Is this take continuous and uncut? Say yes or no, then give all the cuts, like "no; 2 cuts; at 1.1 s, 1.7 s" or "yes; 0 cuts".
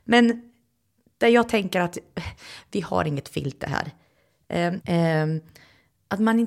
no; 1 cut; at 4.8 s